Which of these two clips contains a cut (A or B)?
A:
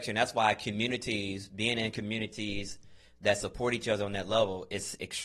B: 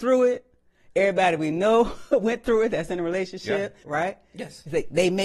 B